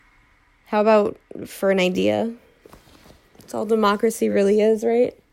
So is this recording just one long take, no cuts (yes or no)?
yes